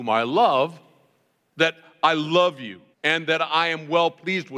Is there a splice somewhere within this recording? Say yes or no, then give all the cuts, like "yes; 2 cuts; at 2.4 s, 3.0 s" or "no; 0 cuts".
yes; 2 cuts; at 1.5 s, 2.9 s